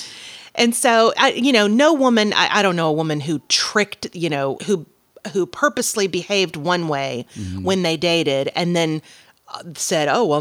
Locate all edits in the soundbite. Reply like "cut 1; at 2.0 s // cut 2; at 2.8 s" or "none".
cut 1; at 4.6 s